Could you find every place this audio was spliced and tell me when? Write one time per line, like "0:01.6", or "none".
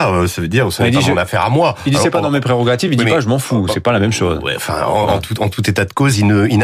none